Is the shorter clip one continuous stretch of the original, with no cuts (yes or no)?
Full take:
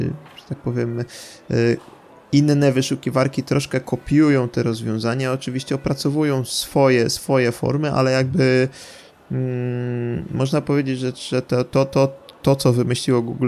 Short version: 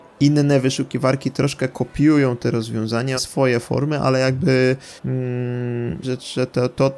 no